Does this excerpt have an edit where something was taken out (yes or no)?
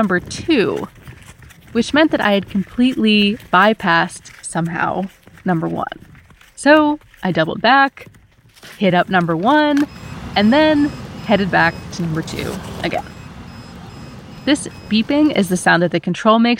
no